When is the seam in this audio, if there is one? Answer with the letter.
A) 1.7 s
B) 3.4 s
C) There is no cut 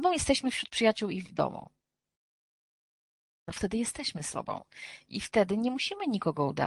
C